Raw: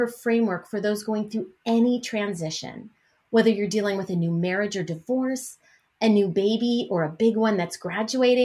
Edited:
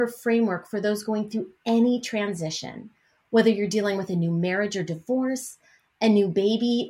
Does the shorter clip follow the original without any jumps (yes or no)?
yes